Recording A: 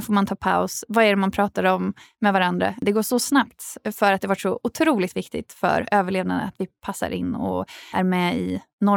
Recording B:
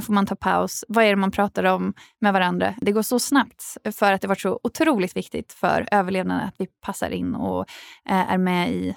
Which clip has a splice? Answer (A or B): A